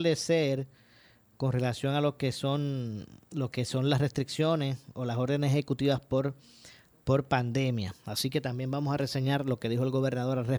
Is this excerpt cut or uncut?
uncut